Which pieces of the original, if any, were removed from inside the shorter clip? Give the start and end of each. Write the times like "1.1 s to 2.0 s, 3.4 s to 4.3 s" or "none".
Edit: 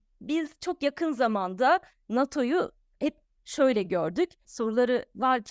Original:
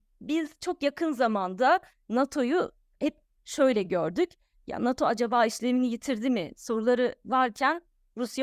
4.4 s to 6.5 s